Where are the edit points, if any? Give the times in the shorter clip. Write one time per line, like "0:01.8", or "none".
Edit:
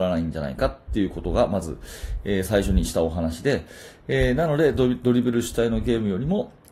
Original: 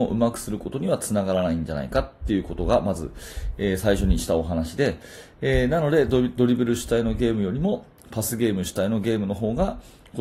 none